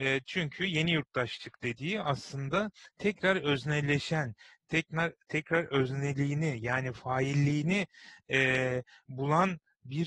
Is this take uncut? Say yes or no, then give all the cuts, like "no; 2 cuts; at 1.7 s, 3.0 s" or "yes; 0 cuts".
yes; 0 cuts